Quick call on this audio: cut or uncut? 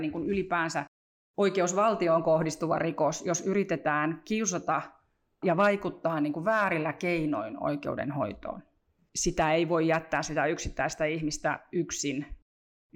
uncut